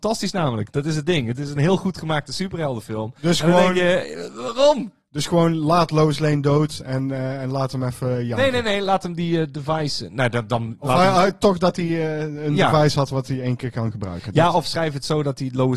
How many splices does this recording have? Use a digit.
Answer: 1